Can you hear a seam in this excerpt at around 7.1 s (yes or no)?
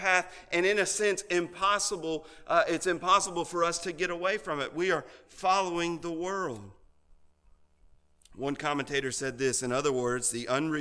no